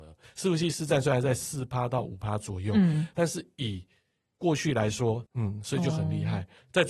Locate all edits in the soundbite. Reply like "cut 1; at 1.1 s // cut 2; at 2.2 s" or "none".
cut 1; at 5.2 s